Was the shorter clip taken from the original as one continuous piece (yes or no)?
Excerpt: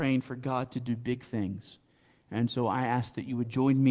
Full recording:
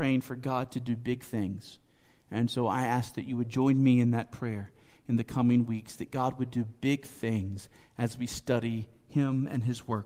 yes